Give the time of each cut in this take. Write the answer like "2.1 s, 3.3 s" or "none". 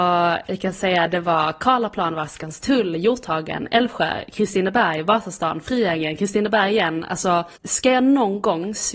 7.6 s